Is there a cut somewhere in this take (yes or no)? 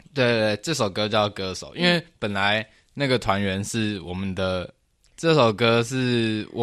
yes